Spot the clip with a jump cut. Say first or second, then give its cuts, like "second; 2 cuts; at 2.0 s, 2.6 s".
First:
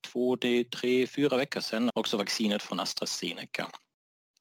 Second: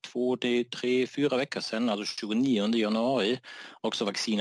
first; 1 cut; at 1.9 s